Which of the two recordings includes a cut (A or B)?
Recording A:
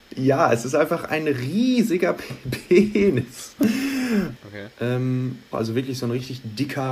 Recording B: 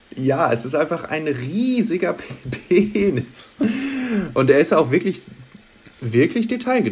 A